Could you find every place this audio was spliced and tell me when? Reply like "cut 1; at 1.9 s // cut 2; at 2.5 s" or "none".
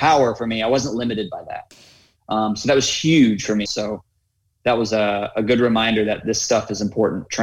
cut 1; at 3.7 s